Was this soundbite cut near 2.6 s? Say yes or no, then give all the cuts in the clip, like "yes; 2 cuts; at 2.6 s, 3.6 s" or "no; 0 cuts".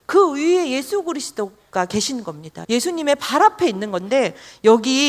yes; 1 cut; at 2.6 s